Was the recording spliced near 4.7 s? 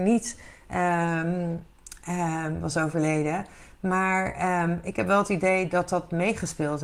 no; 0 cuts

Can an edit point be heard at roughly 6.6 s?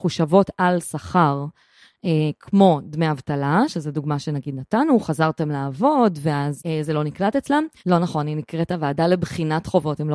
yes; 2 cuts; at 6.6 s, 7.8 s

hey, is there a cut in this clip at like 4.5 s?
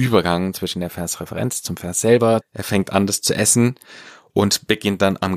no; 1 cut; at 2.4 s

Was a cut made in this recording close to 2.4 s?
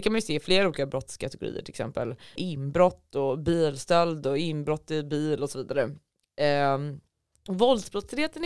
yes; 1 cut; at 2.4 s

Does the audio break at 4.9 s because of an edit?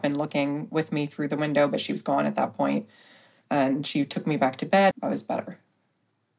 yes; 1 cut; at 4.9 s

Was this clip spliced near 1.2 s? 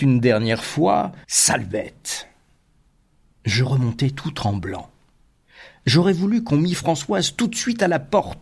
yes; 1 cut; at 1.2 s

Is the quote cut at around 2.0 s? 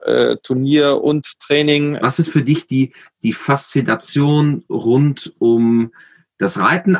yes; 1 cut; at 2.0 s

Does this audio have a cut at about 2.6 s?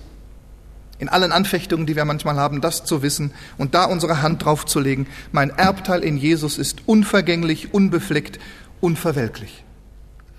no; 0 cuts

